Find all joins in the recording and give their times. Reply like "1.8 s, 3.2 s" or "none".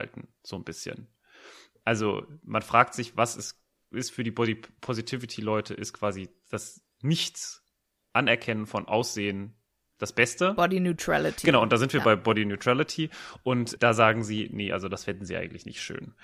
none